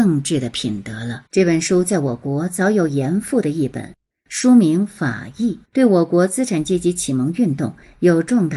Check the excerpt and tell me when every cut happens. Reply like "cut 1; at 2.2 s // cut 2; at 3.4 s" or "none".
cut 1; at 1.3 s // cut 2; at 5.7 s